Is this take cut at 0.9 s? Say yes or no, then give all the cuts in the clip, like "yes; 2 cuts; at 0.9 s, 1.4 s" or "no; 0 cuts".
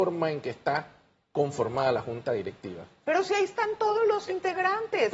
no; 0 cuts